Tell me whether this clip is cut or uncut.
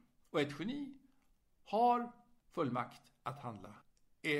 uncut